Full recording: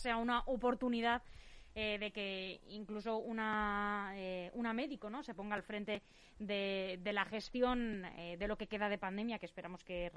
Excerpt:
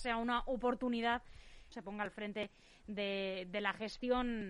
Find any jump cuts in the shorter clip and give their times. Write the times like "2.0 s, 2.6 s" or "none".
1.7 s